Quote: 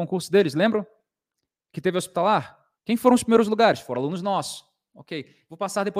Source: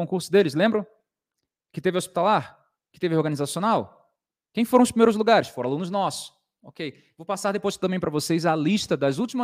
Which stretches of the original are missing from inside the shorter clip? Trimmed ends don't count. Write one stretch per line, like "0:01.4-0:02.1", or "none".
0:02.8-0:04.5